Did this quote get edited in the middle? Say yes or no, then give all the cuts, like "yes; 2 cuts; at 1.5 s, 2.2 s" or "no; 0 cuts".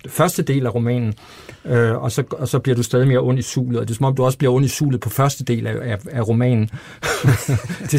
no; 0 cuts